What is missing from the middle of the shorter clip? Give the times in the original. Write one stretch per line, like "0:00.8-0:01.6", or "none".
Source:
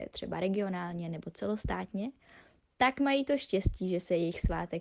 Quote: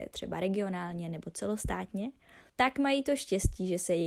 0:02.5-0:02.7